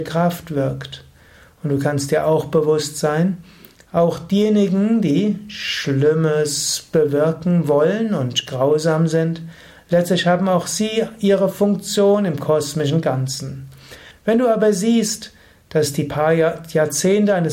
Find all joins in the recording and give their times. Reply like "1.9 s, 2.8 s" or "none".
14.1 s